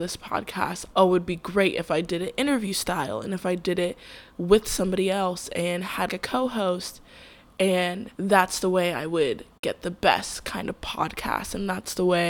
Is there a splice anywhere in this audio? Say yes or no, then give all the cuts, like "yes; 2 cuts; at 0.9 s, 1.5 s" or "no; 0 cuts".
yes; 3 cuts; at 0.9 s, 6.1 s, 8.1 s